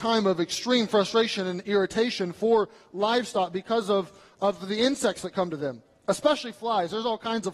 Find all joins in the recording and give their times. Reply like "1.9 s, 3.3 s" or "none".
none